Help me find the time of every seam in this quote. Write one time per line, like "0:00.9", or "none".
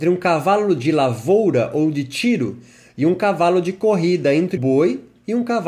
0:04.6